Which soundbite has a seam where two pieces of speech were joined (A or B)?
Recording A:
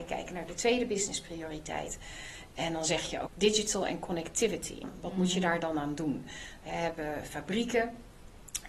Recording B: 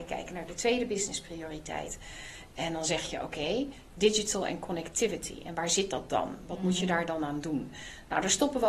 A